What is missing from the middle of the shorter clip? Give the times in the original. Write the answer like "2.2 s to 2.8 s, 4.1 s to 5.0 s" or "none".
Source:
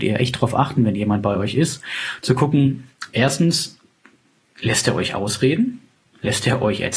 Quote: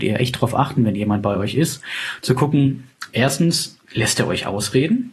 3.8 s to 4.5 s